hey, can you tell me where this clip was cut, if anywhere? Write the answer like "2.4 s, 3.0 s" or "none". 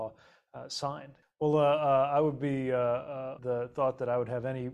1.2 s, 3.4 s